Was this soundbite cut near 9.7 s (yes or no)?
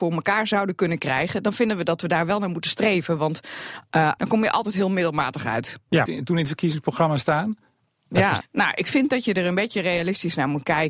no